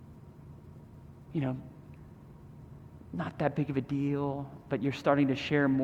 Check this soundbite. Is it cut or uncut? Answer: uncut